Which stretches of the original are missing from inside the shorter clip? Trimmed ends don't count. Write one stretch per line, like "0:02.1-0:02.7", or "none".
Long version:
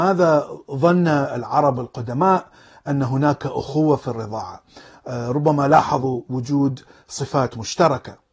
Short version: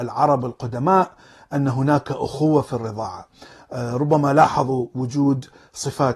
none